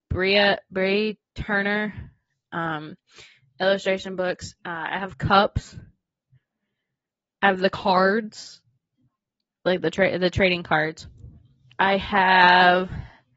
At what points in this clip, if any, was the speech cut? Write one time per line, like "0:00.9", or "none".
none